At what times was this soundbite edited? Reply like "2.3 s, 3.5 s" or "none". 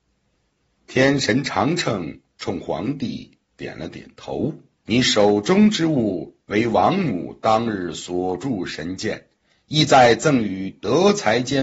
4.7 s